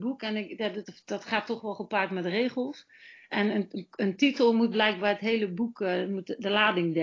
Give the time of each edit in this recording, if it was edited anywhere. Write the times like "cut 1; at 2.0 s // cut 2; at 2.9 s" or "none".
none